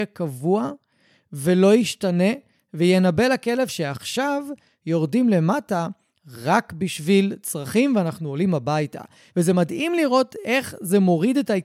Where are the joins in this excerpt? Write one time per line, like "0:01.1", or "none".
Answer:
none